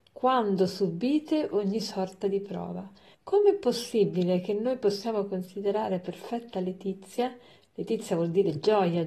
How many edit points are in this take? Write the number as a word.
one